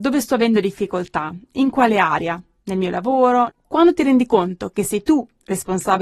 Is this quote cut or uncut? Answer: cut